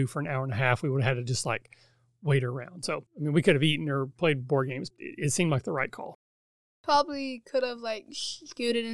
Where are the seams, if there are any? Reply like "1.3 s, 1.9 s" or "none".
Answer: 3.1 s, 4.9 s